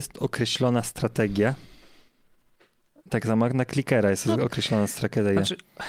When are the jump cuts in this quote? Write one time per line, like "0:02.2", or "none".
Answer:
none